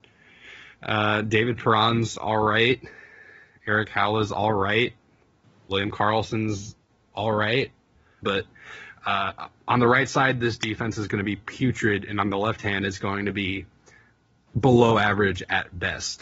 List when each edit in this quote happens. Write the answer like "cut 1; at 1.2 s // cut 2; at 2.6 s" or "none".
cut 1; at 8.2 s

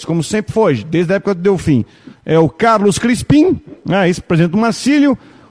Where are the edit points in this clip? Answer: none

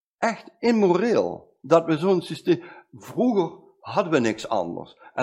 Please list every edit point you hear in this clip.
none

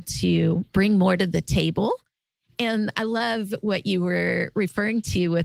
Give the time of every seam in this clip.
none

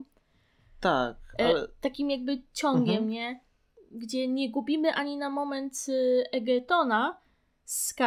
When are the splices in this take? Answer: none

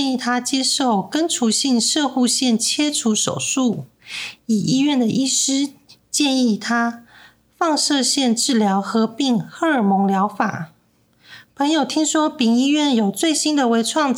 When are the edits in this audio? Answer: none

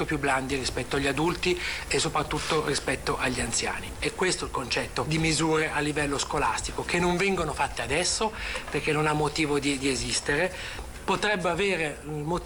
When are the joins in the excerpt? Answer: cut 1; at 3.9 s

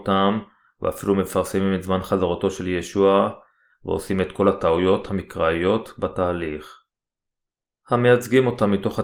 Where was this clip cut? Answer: cut 1; at 3.7 s

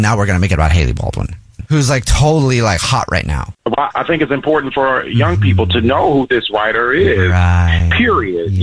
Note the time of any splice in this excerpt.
cut 1; at 3.5 s

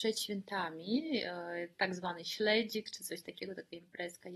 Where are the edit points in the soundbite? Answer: none

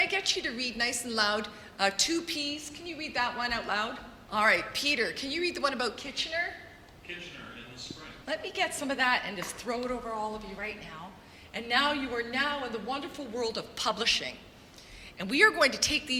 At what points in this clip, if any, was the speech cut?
cut 1; at 4.3 s // cut 2; at 8.2 s

